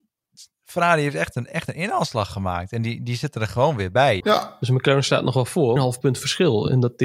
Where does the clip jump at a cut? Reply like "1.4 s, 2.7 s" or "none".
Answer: 4.2 s, 5.8 s